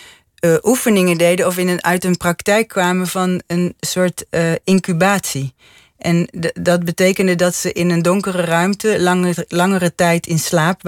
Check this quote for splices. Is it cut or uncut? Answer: uncut